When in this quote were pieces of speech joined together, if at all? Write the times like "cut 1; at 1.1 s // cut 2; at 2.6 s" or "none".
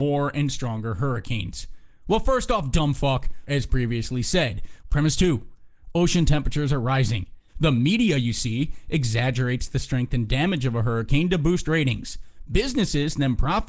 cut 1; at 3.5 s // cut 2; at 4.8 s // cut 3; at 7.5 s